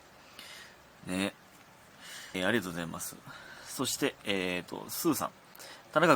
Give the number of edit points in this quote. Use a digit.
1